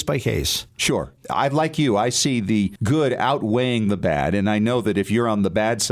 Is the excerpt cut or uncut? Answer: uncut